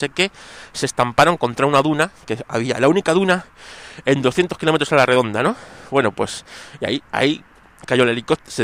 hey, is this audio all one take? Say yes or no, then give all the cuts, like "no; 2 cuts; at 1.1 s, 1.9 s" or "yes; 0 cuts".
yes; 0 cuts